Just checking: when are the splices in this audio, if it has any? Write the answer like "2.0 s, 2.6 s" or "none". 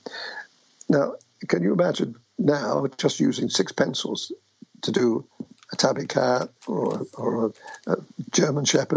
none

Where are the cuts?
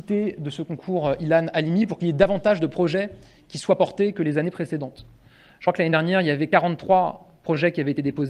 none

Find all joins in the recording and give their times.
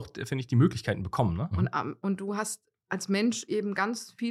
1.5 s

